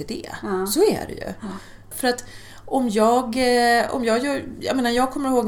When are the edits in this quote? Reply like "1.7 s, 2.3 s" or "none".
1.9 s